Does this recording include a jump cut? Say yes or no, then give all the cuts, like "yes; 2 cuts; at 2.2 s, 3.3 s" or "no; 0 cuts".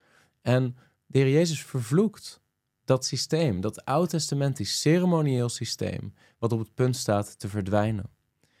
no; 0 cuts